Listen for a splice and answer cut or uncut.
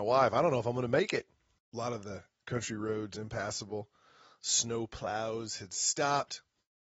cut